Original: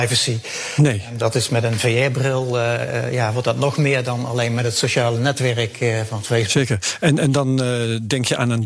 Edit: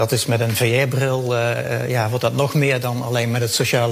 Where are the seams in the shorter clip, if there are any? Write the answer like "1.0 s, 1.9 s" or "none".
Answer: none